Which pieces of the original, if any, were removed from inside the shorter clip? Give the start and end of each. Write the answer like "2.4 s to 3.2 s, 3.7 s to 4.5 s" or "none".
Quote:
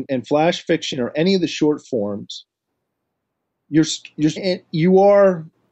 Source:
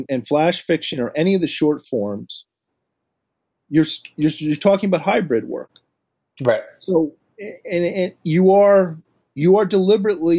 4.4 s to 7.9 s